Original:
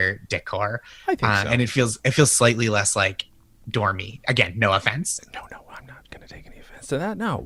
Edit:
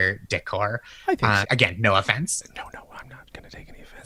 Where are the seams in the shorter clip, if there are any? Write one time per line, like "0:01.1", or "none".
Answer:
0:01.4